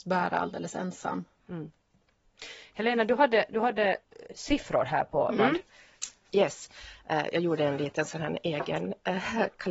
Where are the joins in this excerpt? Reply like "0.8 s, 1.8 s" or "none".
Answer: 5.4 s